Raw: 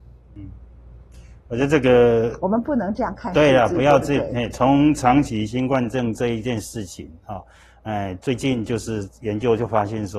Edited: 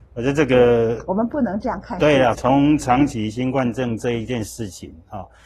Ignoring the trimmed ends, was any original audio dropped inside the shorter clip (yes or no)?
yes